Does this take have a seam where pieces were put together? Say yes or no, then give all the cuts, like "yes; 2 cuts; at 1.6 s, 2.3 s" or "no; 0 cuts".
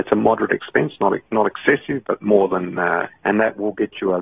yes; 2 cuts; at 2.0 s, 3.1 s